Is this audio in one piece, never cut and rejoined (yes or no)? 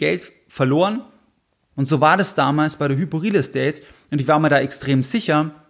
no